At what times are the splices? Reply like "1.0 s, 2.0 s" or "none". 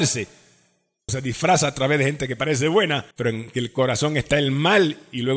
1.1 s, 3.1 s